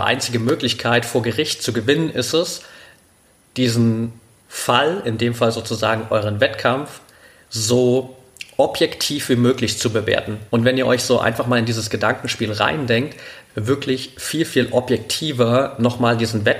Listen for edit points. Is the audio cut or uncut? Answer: cut